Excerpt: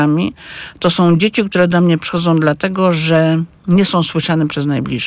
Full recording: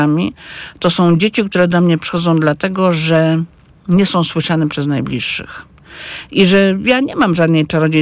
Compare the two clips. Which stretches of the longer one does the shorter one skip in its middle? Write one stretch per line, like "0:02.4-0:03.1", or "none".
0:03.6-0:03.8